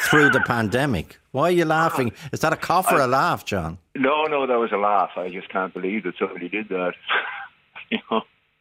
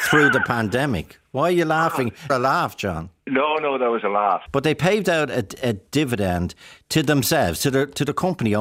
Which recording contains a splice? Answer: second; 2 cuts; at 2.3 s, 4.5 s

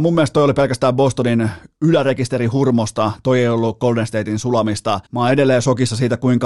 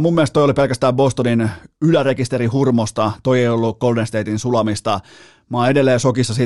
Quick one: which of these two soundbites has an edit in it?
first; 1 cut; at 5.1 s

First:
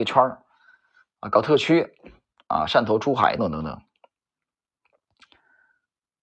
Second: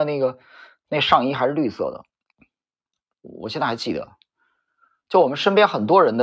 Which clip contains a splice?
first; 1 cut; at 3.4 s

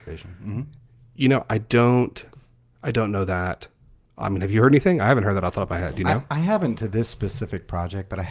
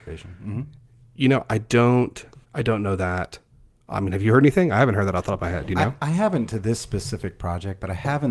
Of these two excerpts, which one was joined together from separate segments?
second; 1 cut; at 2.4 s

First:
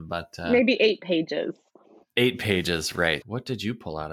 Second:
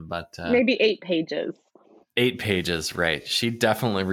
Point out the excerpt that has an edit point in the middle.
first; 1 cut; at 3.2 s

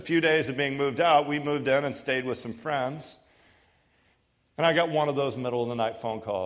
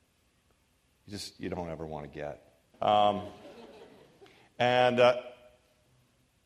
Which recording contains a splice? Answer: second; 1 cut; at 2.7 s

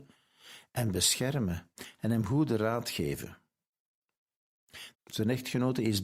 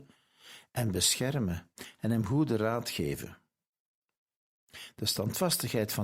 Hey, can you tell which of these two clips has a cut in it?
first; 1 cut; at 4.9 s

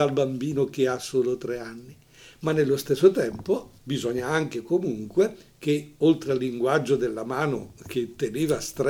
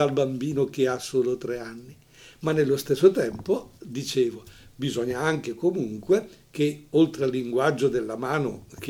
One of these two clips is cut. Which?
first; 1 cut; at 3.8 s

